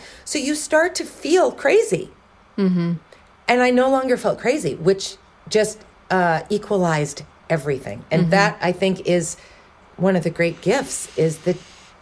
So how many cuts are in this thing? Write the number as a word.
zero